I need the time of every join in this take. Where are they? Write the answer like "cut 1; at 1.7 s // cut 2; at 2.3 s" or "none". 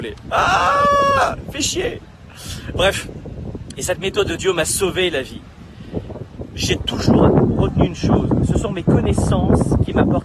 none